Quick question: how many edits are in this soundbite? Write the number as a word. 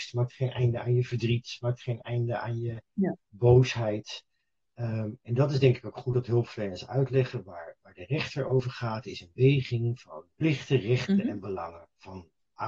two